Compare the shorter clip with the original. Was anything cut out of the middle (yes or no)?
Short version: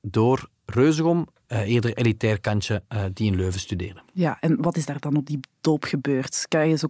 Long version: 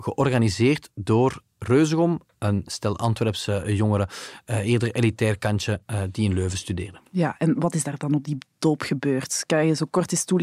yes